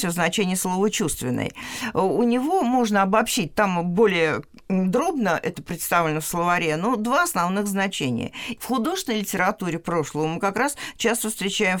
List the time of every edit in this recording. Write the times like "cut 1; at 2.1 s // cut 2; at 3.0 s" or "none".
cut 1; at 8.6 s